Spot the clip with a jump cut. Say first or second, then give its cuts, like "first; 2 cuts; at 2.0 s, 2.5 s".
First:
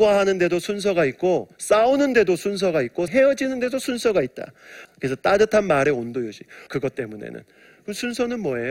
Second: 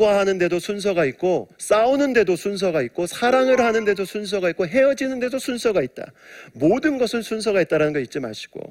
first; 3 cuts; at 3.1 s, 4.8 s, 6.7 s